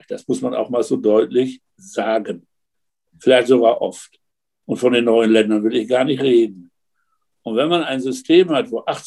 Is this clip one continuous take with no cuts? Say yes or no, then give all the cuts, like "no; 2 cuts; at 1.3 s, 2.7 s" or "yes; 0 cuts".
no; 2 cuts; at 3.1 s, 4.5 s